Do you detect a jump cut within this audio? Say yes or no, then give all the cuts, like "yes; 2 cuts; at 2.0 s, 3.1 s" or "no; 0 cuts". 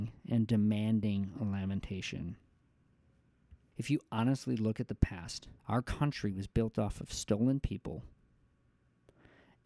yes; 2 cuts; at 3.7 s, 5.6 s